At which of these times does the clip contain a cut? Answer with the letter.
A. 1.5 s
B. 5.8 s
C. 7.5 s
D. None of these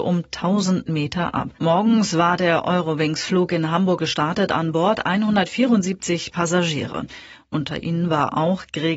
A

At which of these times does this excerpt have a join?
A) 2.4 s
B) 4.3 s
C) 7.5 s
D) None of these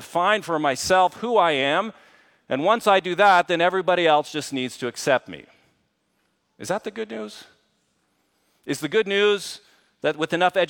D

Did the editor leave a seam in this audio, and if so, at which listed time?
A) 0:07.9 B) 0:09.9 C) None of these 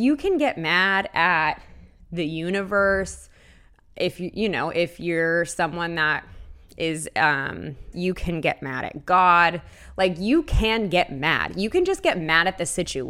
A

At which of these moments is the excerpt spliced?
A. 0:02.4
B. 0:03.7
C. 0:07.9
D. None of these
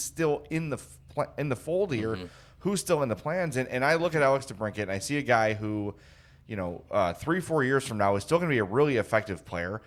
D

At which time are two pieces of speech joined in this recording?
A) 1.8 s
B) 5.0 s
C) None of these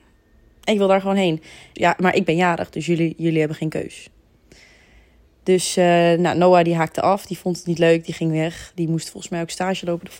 A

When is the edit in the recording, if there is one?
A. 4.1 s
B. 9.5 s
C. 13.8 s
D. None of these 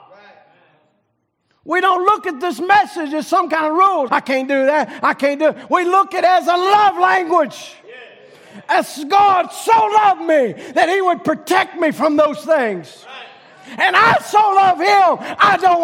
A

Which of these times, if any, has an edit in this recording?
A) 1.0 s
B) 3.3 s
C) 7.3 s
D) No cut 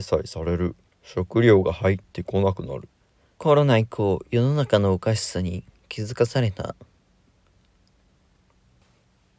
B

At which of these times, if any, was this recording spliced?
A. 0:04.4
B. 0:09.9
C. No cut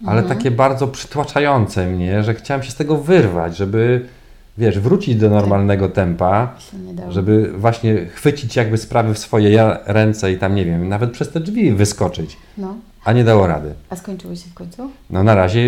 C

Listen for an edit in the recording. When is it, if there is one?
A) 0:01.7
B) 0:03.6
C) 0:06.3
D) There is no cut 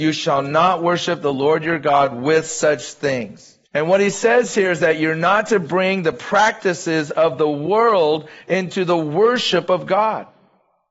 B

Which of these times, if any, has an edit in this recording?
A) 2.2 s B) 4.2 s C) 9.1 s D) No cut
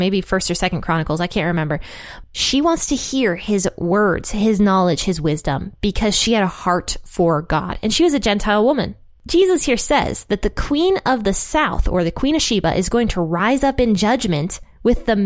A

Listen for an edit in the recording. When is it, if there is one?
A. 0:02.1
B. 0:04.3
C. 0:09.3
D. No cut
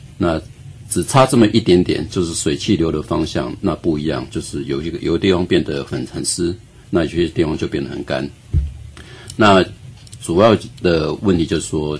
D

